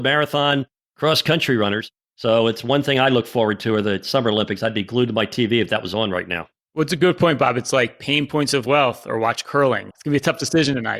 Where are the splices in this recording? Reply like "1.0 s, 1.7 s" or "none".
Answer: 9.9 s